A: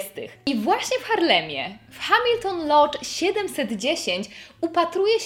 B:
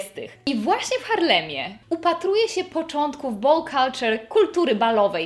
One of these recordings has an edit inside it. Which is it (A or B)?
B